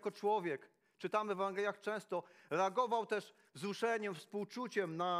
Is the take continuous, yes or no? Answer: yes